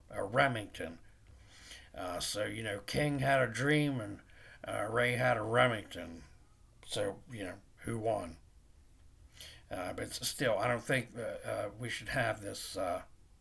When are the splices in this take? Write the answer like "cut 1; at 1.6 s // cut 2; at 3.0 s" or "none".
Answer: cut 1; at 10.2 s